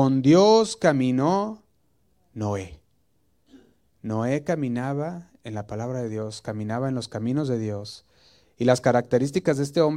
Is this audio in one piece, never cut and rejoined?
yes; 0 cuts

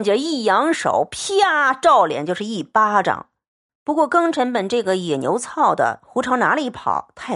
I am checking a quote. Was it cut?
yes; 1 cut; at 3.7 s

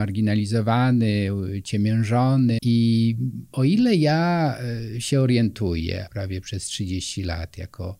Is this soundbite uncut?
no; 2 cuts; at 2.6 s, 6.1 s

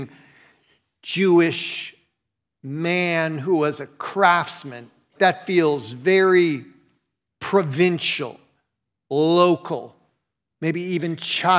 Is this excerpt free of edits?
no; 1 cut; at 5.2 s

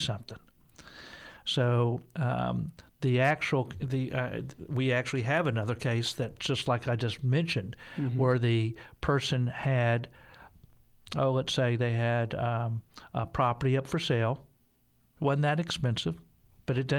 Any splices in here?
no; 0 cuts

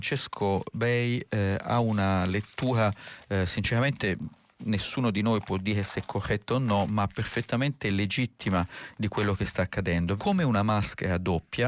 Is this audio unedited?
no; 1 cut; at 10.2 s

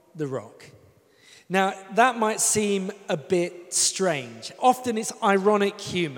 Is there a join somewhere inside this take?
yes; 1 cut; at 4.6 s

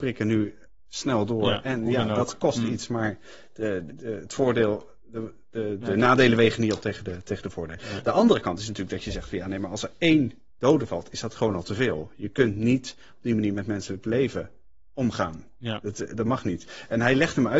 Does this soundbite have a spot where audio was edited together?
yes; 1 cut; at 3.9 s

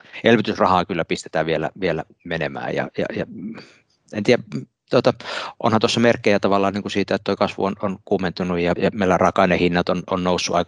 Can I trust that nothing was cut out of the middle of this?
no; 1 cut; at 8.8 s

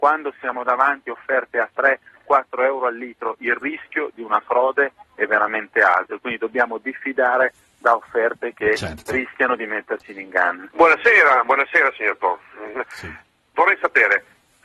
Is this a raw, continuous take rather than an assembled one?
no; 2 cuts; at 10.7 s, 12.8 s

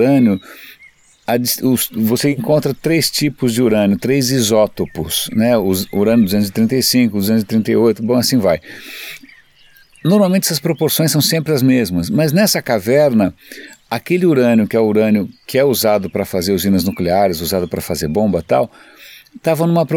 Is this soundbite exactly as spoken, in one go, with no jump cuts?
yes; 0 cuts

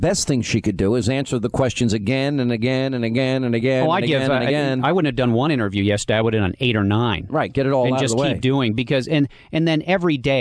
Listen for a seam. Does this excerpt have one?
no; 0 cuts

